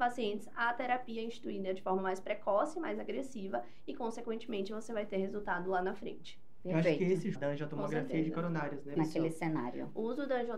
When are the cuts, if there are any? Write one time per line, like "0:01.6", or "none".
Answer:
0:07.3
0:09.0